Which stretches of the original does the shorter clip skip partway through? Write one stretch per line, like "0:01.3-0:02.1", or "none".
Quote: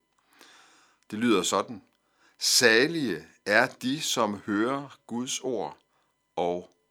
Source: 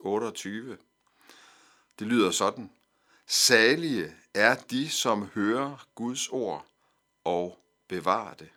none

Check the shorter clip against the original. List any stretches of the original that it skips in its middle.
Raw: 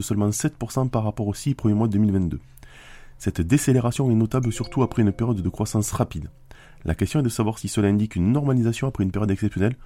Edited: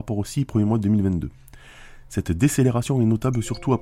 none

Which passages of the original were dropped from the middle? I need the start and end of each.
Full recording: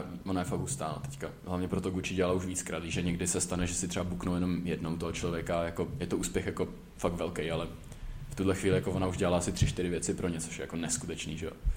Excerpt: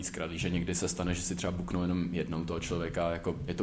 none

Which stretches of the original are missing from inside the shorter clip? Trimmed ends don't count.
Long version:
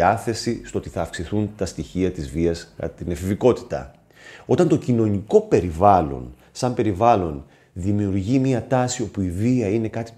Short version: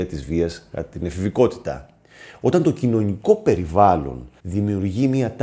0:06.5-0:07.7

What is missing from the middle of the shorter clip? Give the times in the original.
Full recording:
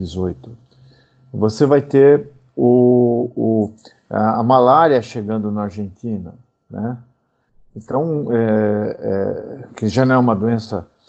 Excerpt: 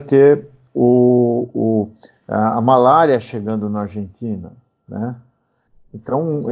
none

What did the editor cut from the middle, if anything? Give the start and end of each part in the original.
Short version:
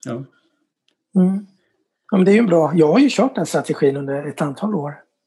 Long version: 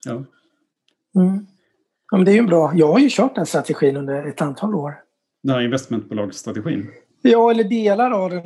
none

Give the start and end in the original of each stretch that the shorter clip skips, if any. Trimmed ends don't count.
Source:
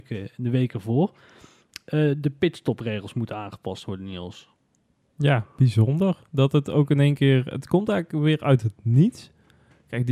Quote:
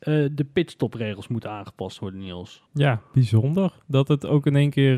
0:04.5-0:05.1

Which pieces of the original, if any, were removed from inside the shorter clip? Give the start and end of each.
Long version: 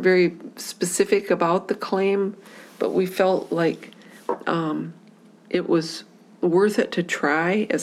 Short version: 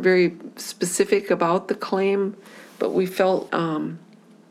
0:03.5-0:04.4

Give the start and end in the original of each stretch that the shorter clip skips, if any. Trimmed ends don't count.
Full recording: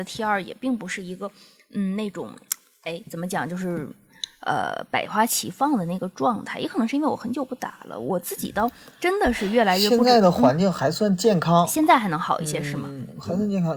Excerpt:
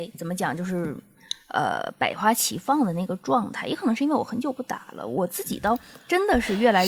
none

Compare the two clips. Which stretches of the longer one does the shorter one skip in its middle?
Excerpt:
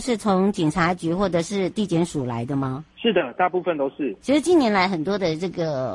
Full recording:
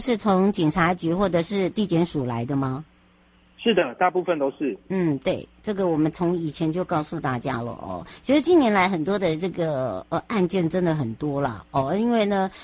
0:02.9-0:03.5
0:04.8-0:08.2

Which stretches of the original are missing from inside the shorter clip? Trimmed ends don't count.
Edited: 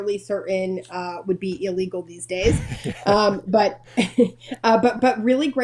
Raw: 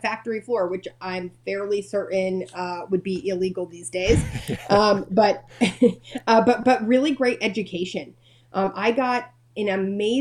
none

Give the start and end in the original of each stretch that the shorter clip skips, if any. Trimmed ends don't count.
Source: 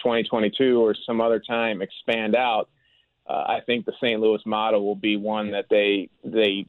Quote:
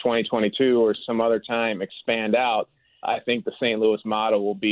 0:03.0-0:03.4

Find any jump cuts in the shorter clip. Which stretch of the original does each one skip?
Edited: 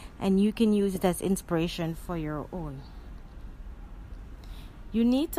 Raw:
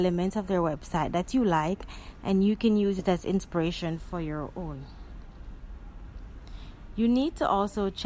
none

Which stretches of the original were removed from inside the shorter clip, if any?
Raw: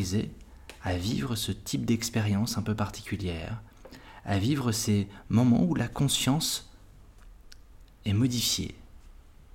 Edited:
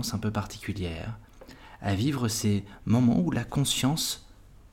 none

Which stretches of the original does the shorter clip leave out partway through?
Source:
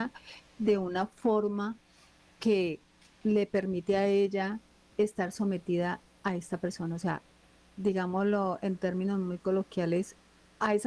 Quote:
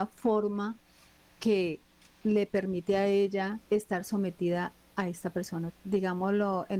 0:04.7-0:04.9
0:07.0-0:07.6

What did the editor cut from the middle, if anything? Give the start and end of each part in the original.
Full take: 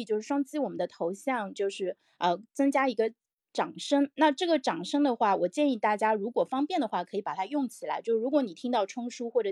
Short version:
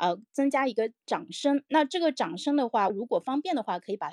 0:03.2-0:03.5
0:05.4-0:06.1

